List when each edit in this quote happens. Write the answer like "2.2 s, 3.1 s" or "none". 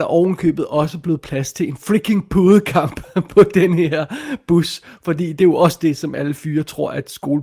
none